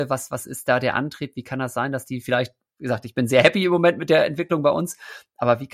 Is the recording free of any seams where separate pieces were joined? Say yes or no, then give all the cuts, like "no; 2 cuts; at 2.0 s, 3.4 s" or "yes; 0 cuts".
yes; 0 cuts